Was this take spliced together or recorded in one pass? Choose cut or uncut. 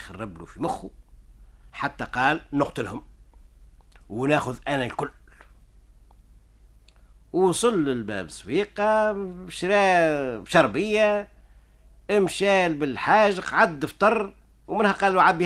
uncut